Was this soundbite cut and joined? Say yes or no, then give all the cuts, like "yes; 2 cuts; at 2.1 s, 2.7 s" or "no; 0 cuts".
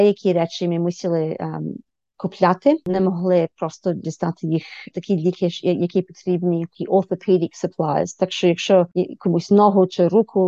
no; 0 cuts